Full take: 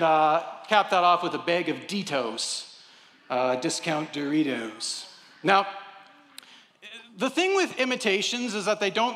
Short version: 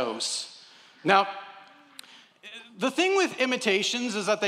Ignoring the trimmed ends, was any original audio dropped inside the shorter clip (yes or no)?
yes